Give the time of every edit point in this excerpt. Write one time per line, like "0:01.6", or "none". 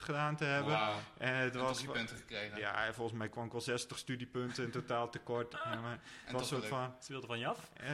none